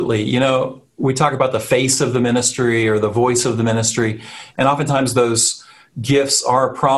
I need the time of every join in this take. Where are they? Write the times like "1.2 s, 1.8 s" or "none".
none